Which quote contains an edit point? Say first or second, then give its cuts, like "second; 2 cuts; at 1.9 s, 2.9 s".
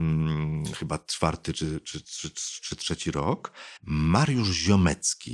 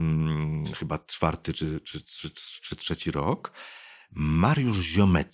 first; 1 cut; at 3.8 s